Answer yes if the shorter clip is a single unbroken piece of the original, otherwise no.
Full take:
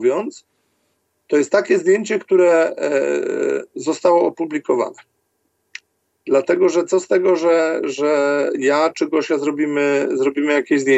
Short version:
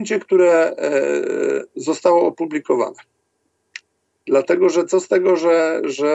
yes